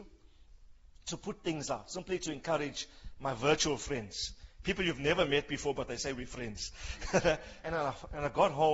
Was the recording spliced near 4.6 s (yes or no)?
yes